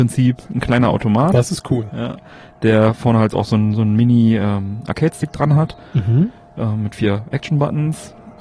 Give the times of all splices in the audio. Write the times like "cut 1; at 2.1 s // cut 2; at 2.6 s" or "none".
none